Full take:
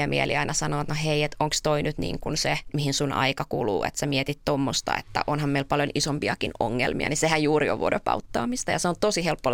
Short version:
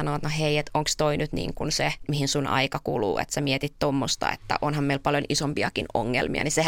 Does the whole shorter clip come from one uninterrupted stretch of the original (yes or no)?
yes